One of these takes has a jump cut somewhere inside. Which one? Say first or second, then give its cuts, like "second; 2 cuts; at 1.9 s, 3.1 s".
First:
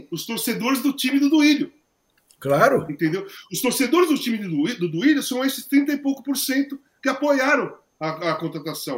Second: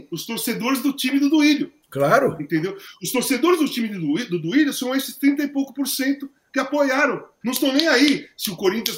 second; 2 cuts; at 1.8 s, 7.4 s